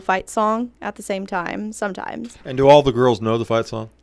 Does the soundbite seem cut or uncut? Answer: uncut